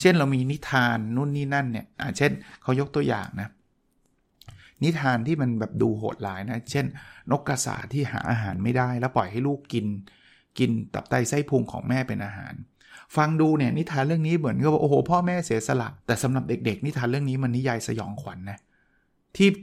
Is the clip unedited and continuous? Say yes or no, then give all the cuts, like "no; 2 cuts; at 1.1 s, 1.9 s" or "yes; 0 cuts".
no; 1 cut; at 16.0 s